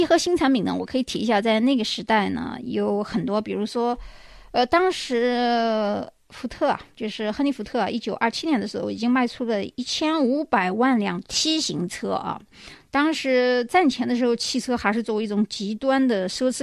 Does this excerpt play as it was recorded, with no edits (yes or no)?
yes